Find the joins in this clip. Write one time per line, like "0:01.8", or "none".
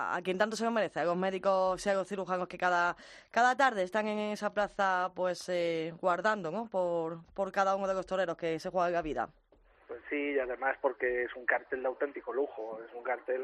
none